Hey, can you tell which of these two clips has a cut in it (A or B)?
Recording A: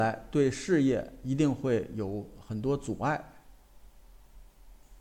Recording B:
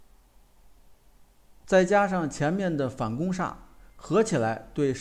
B